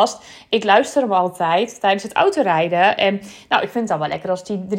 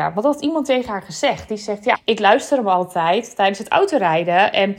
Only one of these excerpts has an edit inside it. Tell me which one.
second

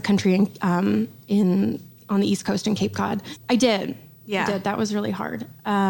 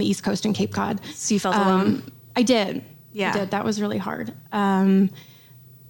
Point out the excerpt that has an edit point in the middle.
first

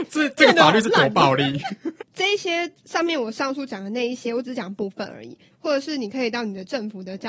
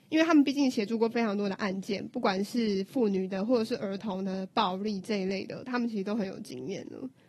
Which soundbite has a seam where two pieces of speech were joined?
first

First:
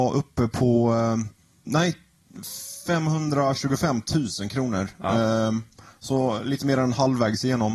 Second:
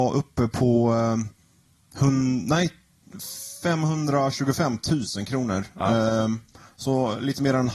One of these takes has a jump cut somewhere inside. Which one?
first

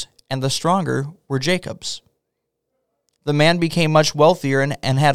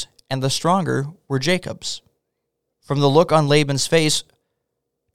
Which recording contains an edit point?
second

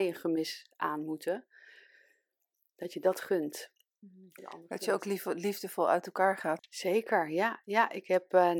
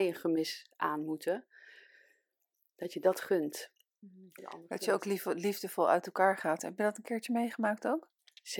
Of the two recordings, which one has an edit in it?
first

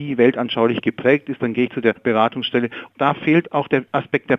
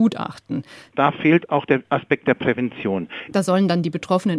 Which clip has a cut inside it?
second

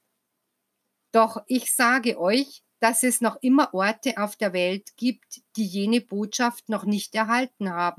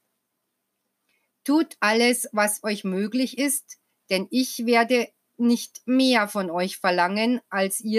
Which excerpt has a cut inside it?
first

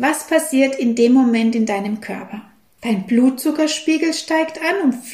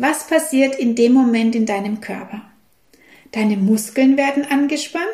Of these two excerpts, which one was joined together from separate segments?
first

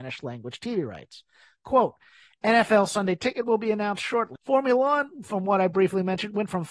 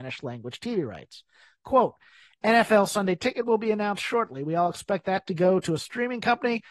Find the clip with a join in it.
first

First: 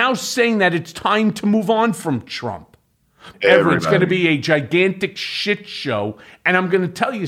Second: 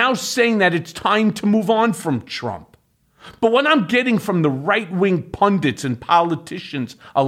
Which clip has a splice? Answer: first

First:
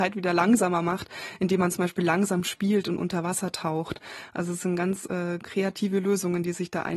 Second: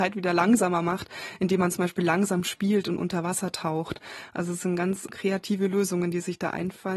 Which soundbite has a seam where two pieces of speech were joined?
second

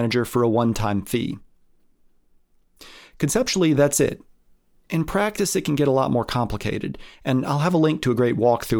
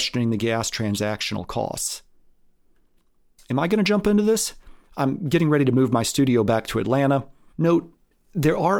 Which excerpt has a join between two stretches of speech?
second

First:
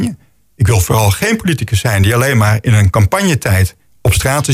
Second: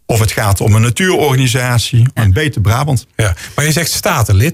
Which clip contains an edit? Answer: second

